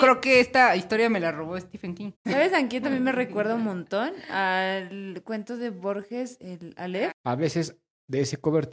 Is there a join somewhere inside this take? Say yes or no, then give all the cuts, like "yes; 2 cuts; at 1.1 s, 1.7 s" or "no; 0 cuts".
yes; 2 cuts; at 2.1 s, 7.1 s